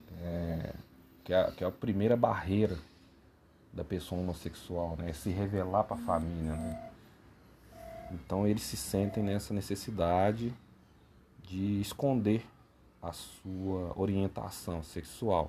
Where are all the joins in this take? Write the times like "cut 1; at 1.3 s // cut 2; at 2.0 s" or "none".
none